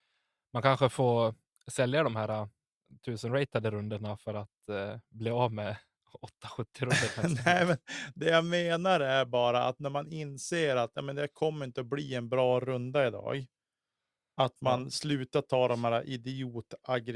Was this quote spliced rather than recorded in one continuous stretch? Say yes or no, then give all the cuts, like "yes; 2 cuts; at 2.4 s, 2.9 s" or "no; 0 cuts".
no; 0 cuts